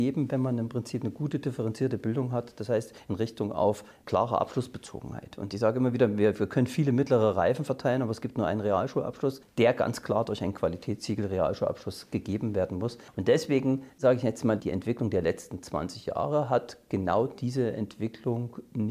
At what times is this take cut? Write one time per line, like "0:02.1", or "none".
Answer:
none